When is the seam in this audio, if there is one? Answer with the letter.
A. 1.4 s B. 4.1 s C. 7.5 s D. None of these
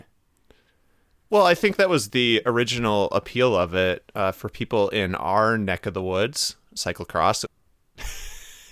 C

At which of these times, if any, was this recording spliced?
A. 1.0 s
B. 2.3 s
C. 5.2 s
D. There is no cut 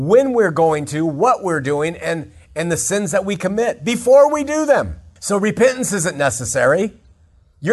C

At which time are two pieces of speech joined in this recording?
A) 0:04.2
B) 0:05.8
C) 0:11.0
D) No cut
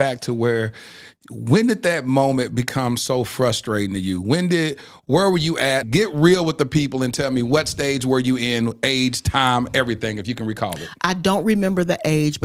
B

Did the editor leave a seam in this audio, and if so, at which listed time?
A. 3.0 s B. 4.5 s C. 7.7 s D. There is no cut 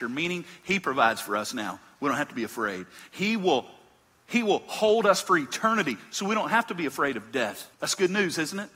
C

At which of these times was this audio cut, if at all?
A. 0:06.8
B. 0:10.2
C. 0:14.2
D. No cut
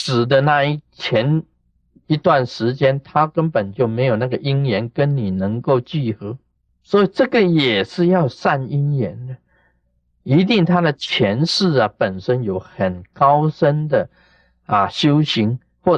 A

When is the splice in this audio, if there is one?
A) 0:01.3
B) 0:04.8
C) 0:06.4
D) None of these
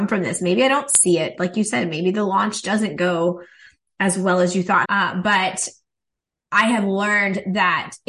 B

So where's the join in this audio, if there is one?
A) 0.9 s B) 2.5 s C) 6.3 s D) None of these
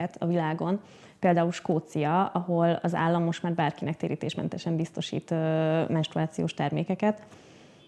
D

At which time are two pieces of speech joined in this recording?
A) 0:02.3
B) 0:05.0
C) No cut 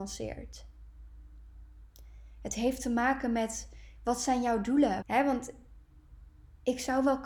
B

